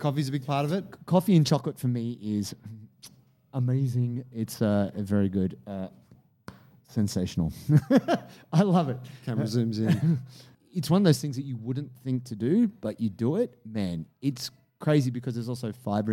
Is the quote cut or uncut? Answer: uncut